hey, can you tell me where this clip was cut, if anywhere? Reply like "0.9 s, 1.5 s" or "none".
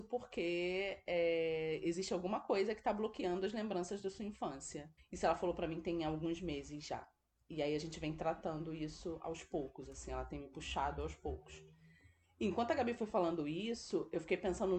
5.0 s